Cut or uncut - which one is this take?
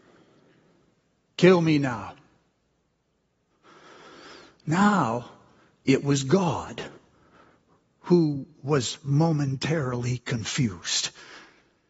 uncut